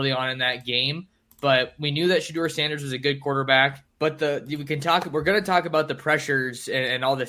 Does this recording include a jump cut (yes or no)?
yes